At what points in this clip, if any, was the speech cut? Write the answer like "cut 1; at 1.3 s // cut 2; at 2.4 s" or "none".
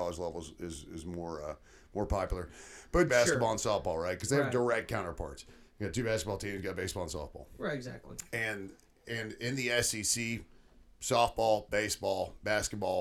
cut 1; at 3.1 s